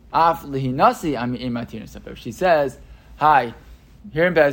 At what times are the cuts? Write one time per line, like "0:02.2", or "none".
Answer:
none